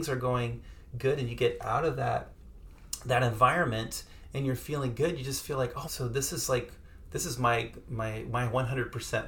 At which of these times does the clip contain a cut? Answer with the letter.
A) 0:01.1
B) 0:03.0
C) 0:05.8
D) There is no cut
C